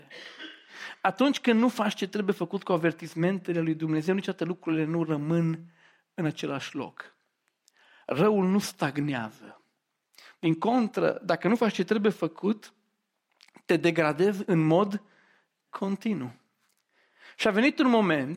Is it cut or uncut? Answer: uncut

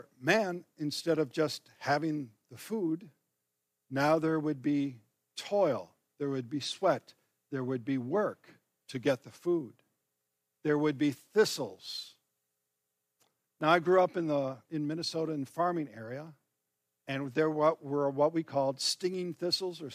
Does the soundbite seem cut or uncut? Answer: uncut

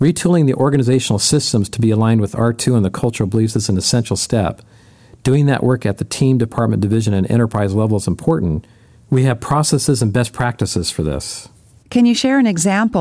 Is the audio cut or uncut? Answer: uncut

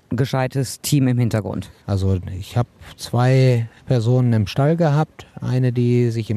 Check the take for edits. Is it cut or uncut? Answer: cut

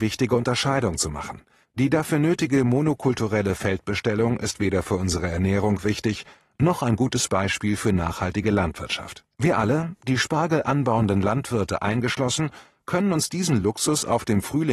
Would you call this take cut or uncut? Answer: cut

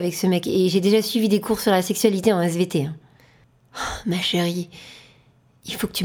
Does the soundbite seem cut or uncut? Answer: uncut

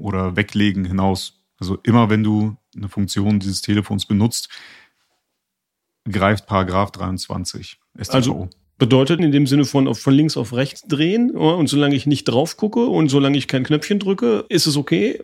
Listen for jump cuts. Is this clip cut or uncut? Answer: cut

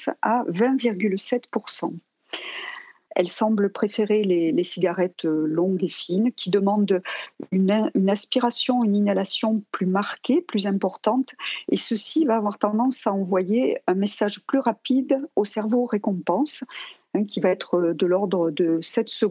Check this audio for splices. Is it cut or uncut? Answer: cut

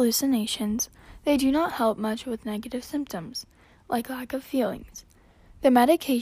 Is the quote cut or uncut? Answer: uncut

